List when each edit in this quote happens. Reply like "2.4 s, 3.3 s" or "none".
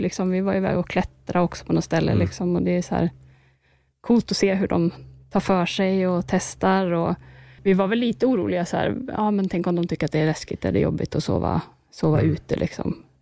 7.6 s

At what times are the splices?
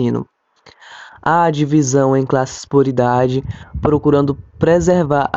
none

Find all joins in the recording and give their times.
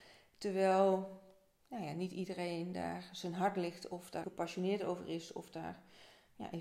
4.2 s

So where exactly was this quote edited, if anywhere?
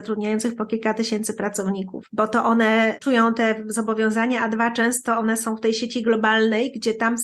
none

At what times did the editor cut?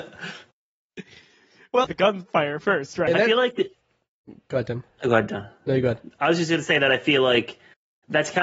1.8 s, 3.1 s

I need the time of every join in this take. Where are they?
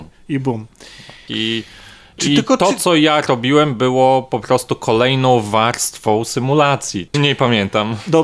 1.3 s, 7.1 s

